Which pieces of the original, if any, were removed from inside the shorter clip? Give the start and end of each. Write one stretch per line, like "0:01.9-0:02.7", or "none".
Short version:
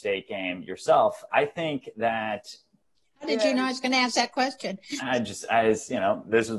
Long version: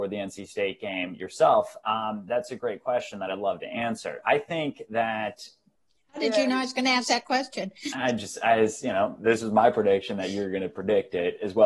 0:01.8-0:04.2